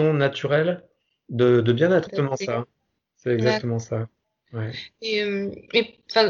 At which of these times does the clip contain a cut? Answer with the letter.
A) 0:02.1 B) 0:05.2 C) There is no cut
A